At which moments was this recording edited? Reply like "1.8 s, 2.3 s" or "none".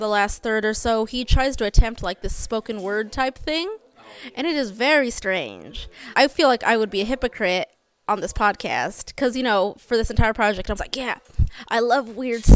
10.8 s